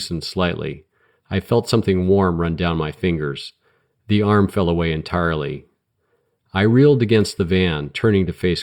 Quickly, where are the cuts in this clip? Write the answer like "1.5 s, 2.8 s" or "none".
none

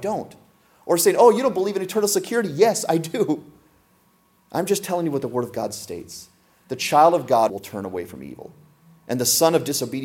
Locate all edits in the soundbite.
7.5 s

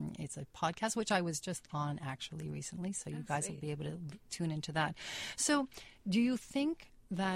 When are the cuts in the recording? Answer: none

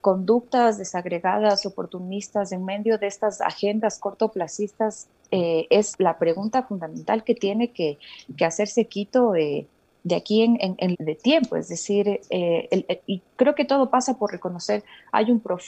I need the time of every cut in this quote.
5.9 s, 10.9 s, 13.0 s

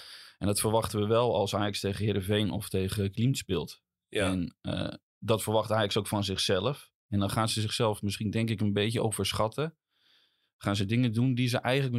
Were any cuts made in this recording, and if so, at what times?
none

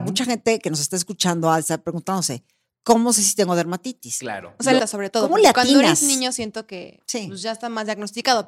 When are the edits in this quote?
4.8 s

